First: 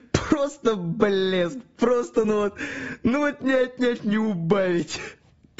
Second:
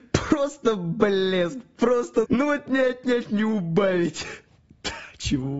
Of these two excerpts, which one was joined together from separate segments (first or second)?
second